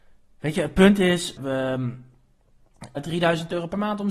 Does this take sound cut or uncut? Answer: cut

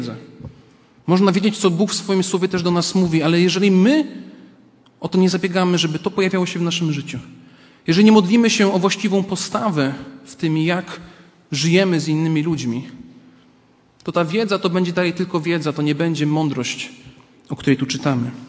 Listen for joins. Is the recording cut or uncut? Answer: uncut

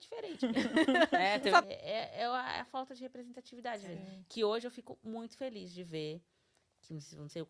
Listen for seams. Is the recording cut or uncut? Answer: cut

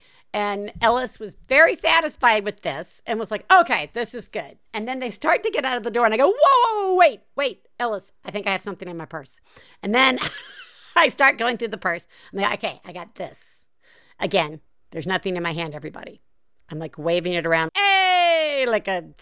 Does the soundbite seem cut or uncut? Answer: cut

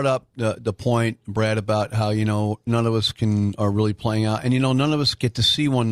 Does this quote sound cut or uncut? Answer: uncut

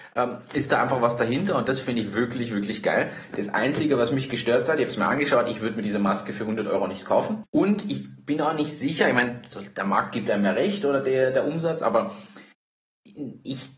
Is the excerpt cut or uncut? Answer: cut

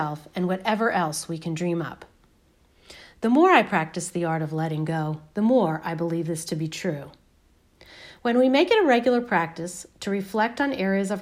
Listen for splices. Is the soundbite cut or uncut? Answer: uncut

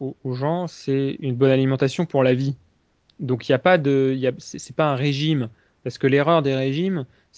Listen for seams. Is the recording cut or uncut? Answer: uncut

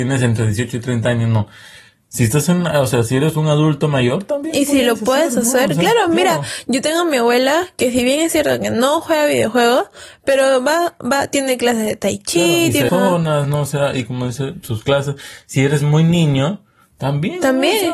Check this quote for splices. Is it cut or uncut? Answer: cut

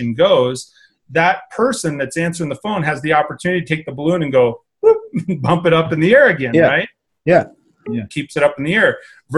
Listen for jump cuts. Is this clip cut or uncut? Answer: cut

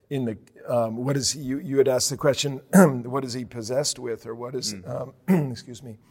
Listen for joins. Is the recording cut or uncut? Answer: uncut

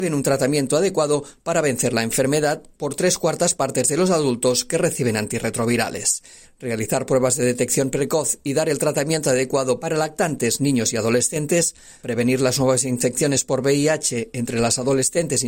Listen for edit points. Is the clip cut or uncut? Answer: cut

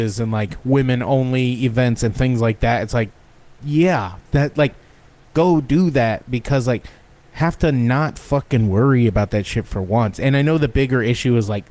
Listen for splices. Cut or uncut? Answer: cut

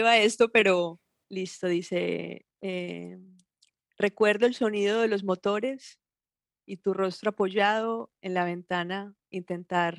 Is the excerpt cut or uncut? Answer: cut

